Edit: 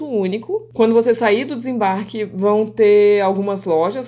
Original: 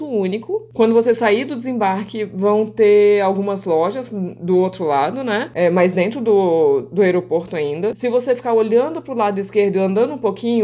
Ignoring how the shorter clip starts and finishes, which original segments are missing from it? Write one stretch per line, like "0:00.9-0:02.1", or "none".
none